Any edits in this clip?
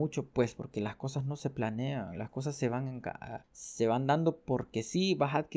yes; 1 cut; at 3.4 s

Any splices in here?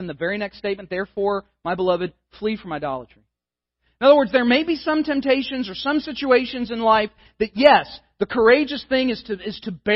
no; 0 cuts

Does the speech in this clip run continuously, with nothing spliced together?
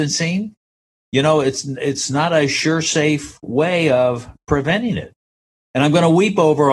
no; 1 cut; at 5.6 s

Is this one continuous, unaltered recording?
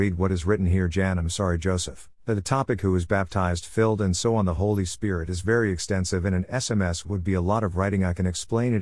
yes; 0 cuts

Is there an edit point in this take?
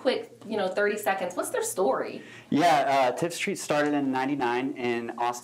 no; 0 cuts

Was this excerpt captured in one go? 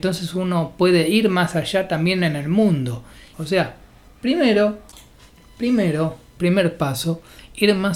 no; 2 cuts; at 3.3 s, 6.4 s

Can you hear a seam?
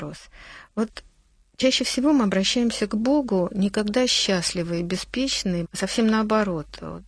yes; 1 cut; at 5.6 s

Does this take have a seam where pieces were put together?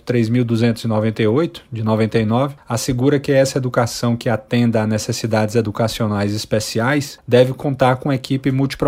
no; 0 cuts

